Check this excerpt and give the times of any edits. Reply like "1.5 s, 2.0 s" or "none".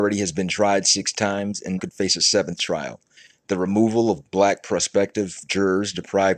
1.8 s